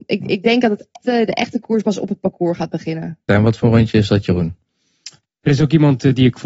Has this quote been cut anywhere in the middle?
yes; 3 cuts; at 1.0 s, 3.3 s, 5.2 s

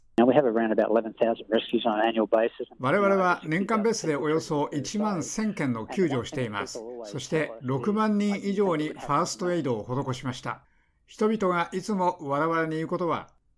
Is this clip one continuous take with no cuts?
yes; 0 cuts

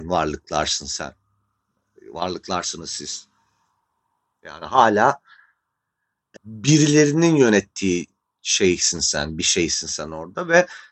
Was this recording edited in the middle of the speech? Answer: yes; 1 cut; at 6.4 s

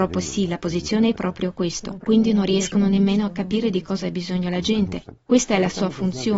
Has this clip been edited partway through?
yes; 1 cut; at 5.2 s

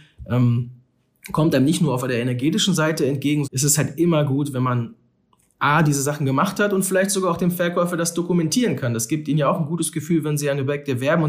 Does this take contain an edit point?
yes; 1 cut; at 3.4 s

